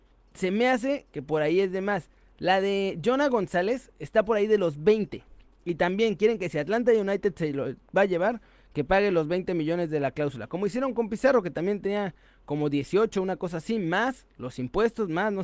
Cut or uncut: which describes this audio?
uncut